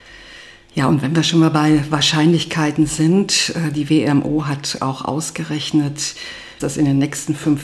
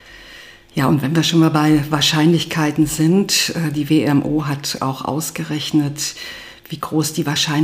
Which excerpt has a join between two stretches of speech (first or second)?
first